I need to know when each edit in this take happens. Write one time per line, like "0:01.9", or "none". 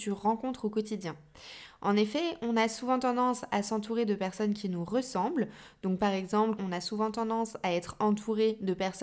0:06.6